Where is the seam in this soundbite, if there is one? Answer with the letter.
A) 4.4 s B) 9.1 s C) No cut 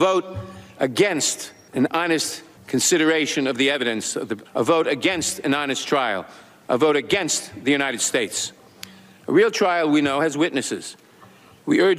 A